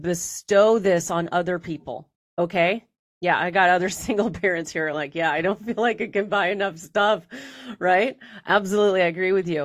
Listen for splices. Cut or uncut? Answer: uncut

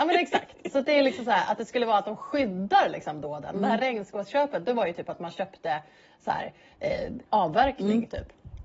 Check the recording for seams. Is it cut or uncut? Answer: cut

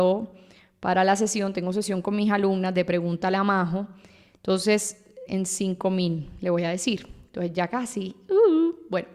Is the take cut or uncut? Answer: cut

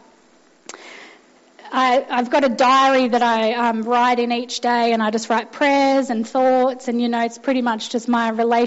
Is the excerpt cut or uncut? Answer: uncut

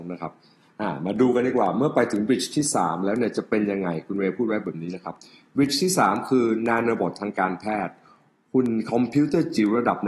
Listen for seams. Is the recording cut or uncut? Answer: uncut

